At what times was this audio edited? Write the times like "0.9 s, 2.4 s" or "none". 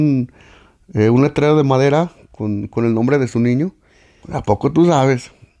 4.2 s